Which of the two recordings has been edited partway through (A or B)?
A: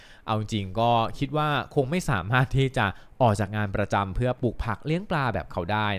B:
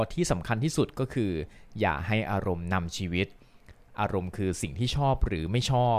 A